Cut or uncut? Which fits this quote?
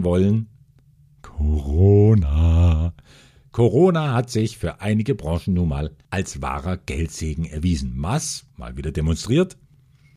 uncut